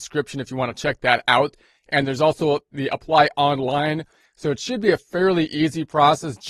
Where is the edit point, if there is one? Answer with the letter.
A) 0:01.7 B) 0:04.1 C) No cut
C